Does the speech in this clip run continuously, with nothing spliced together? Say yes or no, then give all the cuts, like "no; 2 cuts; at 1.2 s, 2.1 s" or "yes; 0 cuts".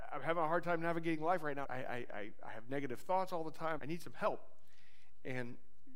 no; 2 cuts; at 1.6 s, 3.8 s